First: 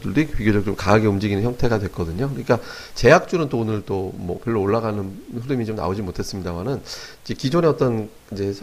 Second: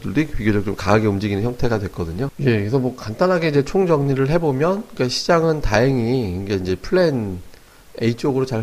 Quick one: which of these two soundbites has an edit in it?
second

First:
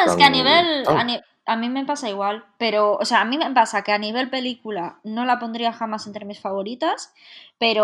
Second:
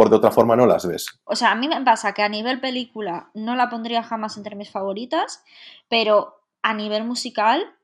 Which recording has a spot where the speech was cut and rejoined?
second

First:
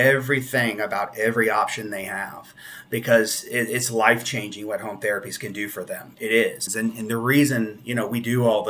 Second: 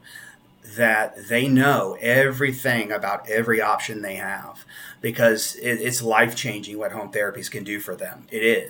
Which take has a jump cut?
first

